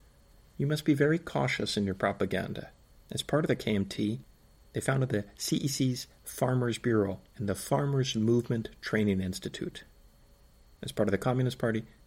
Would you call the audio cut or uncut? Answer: cut